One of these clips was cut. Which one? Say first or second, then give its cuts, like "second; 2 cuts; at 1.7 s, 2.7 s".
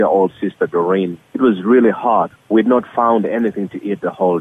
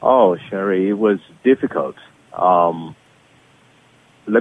first; 2 cuts; at 1.2 s, 2.3 s